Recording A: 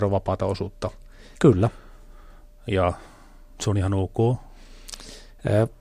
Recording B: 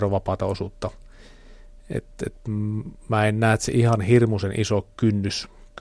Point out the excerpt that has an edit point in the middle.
A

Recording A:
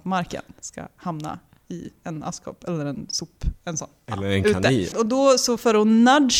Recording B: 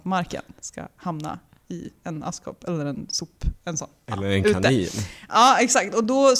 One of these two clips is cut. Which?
A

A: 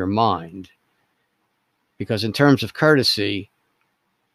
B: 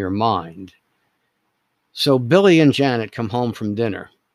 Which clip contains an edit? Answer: B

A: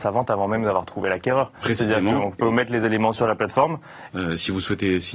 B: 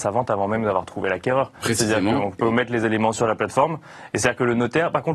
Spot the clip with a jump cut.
A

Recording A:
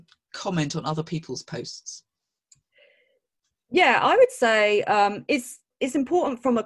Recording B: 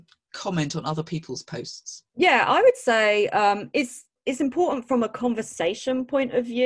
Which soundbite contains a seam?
B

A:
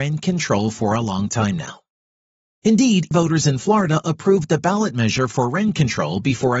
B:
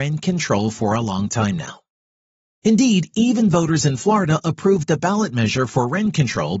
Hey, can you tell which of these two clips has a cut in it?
A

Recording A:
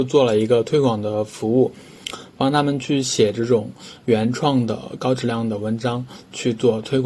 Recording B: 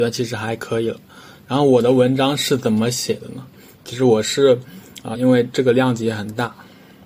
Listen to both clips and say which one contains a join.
B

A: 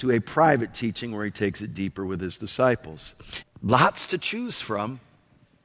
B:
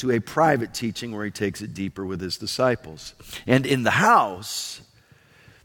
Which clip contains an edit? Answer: A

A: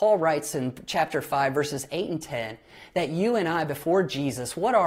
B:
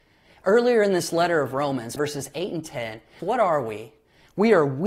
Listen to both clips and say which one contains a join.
B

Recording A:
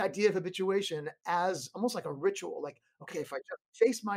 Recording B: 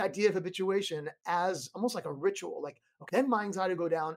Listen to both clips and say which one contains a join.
B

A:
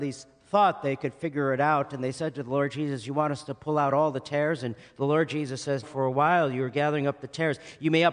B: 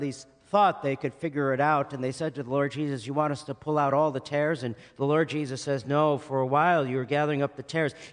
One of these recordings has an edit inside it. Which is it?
A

